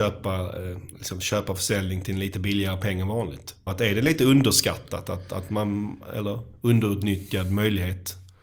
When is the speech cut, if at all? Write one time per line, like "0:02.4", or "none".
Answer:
0:03.7